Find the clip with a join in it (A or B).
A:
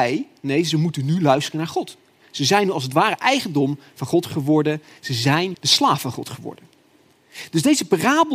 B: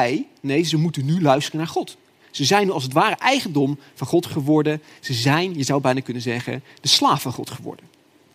A